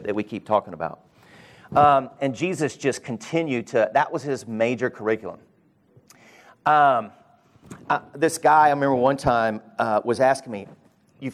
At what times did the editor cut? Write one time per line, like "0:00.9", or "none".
none